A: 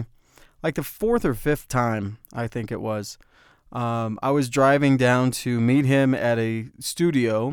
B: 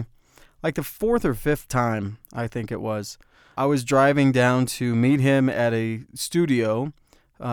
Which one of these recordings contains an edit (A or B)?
B